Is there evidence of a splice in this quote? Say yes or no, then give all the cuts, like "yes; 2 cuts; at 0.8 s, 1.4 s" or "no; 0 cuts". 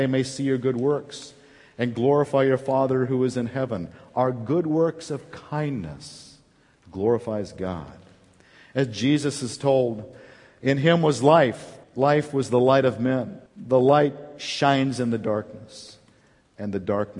yes; 2 cuts; at 11.8 s, 13.5 s